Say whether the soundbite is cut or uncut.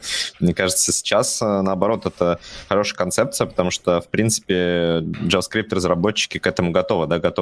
cut